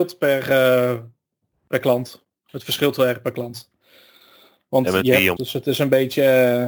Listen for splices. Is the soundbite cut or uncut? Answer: cut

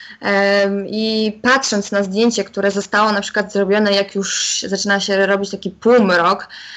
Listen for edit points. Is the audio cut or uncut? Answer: uncut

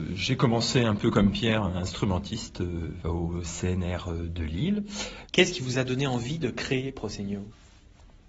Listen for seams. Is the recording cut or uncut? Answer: cut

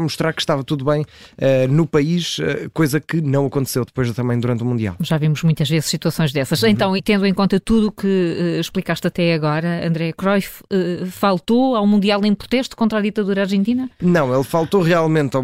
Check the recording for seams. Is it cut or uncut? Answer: cut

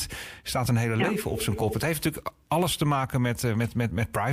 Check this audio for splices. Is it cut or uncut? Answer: uncut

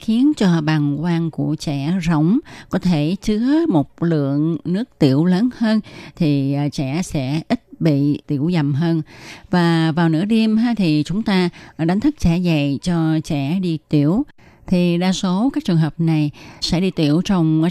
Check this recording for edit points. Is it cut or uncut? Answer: cut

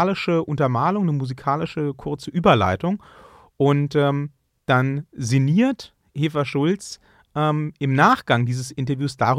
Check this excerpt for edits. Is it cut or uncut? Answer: uncut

